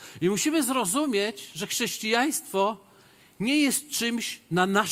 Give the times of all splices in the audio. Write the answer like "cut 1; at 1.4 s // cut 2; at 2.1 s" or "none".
none